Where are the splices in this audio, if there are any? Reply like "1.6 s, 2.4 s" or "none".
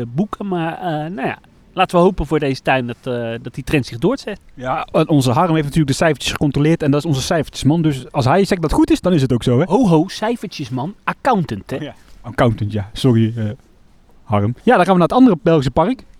14.6 s